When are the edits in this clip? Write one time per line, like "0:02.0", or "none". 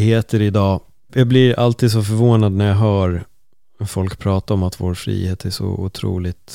0:01.1